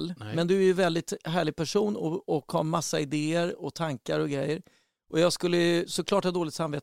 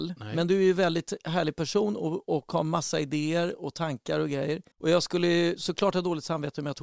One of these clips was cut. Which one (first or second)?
second